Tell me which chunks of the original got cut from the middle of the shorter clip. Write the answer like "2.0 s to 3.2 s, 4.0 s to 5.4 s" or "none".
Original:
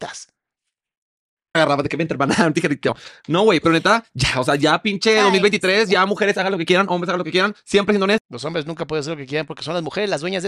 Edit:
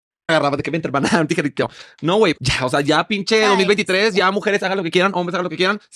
3.6 s to 4.1 s